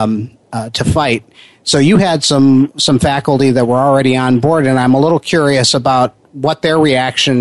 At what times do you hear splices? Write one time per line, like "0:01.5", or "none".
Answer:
none

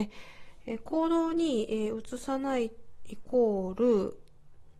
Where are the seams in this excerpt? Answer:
none

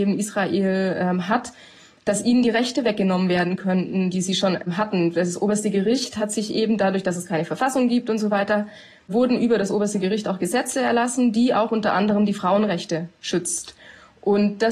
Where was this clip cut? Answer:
none

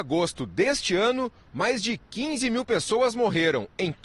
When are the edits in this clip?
none

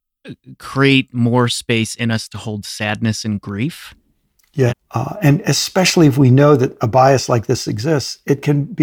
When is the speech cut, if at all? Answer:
0:04.7

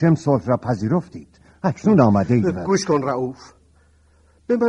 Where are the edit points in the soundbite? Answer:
none

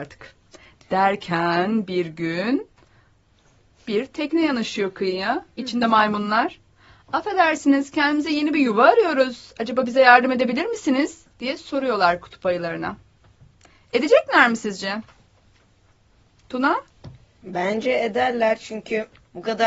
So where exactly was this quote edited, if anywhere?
none

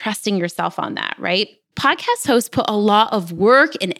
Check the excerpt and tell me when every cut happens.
0:01.7

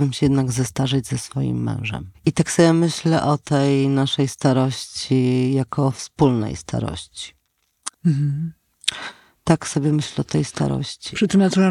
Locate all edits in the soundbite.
0:02.1
0:07.9

